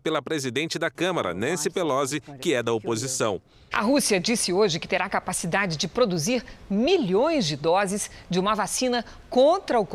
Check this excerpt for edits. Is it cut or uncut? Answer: cut